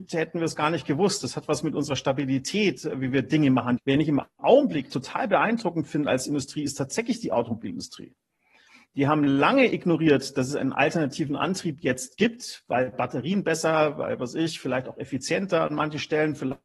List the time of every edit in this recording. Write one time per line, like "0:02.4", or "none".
0:03.8